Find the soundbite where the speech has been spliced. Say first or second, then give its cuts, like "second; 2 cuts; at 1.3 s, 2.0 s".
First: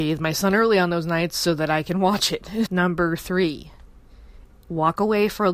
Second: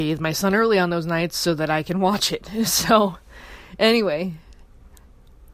first; 2 cuts; at 2.7 s, 4.5 s